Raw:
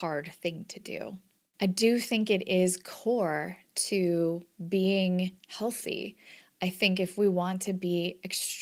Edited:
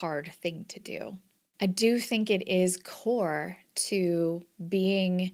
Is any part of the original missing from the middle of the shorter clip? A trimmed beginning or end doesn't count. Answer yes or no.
no